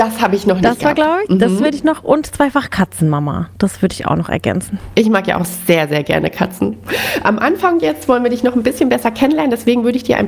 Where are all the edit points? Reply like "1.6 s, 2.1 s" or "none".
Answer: 6.9 s